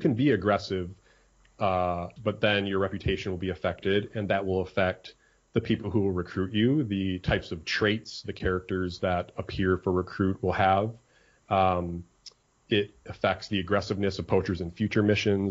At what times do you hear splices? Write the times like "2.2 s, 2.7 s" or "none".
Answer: 2.2 s